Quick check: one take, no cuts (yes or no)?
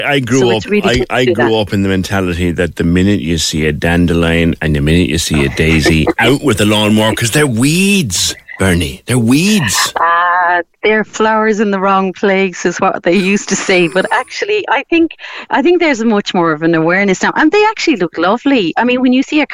yes